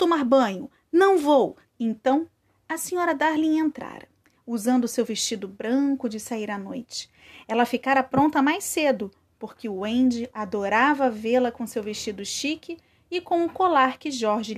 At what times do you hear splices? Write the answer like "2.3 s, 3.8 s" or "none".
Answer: 1.6 s